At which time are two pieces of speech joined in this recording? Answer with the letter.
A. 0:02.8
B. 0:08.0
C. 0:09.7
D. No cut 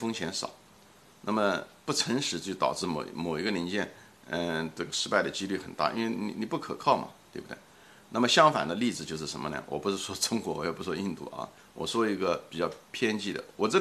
D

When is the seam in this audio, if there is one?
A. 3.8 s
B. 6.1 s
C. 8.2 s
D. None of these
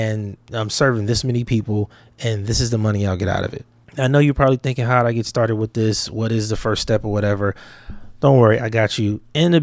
A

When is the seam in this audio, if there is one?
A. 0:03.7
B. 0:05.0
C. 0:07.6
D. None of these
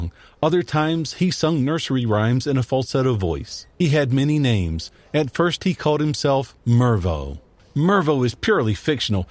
C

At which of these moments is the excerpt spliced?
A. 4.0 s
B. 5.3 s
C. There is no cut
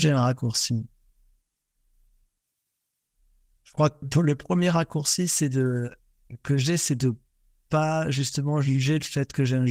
A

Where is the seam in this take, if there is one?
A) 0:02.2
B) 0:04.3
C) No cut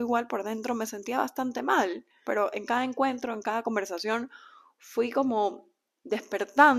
A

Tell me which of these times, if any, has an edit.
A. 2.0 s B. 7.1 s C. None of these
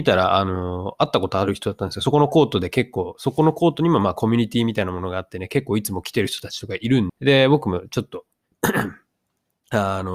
B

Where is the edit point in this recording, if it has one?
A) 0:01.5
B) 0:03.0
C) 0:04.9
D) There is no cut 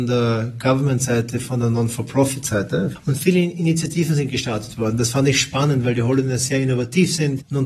D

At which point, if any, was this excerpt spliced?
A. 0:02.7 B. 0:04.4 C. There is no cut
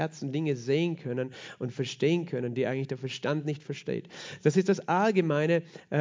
C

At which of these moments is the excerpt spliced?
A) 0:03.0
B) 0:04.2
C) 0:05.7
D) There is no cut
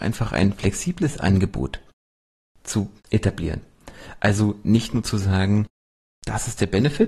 A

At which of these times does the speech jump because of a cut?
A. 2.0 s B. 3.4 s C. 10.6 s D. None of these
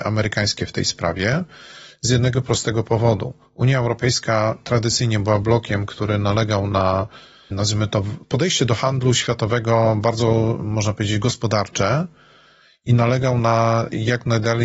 D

